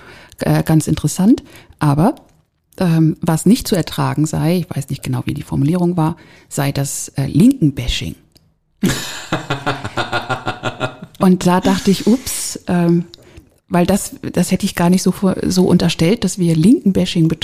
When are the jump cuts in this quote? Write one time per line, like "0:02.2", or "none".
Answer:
none